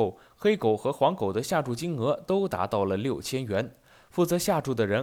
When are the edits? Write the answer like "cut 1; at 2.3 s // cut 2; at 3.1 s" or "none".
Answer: none